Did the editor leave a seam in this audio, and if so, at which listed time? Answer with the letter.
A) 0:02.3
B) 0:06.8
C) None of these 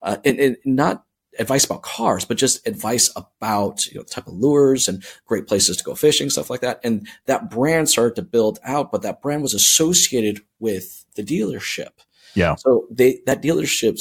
C